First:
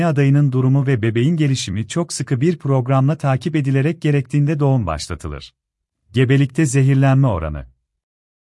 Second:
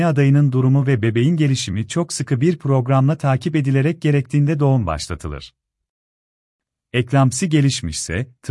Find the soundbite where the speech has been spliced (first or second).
first